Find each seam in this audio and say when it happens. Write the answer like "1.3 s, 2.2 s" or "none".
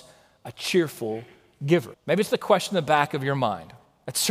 1.9 s